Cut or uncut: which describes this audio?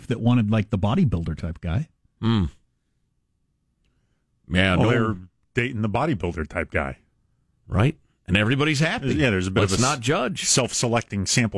uncut